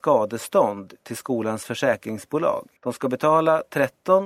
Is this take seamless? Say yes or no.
no